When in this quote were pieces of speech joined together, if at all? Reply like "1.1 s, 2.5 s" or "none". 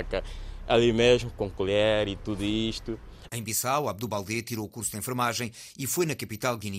3.3 s